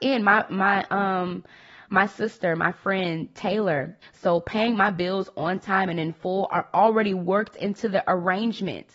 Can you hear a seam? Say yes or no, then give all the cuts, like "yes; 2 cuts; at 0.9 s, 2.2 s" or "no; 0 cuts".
yes; 1 cut; at 4.0 s